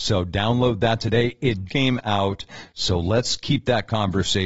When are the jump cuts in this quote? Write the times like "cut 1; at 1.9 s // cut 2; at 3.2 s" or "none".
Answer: cut 1; at 1.7 s